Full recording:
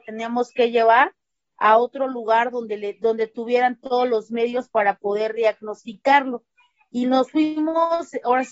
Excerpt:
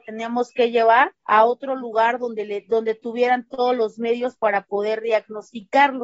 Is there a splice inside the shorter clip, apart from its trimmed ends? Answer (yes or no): yes